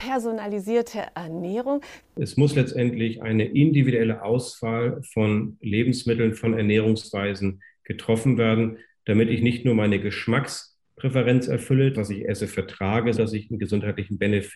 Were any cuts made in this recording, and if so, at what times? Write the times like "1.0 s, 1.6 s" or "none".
2.0 s, 11.9 s, 13.2 s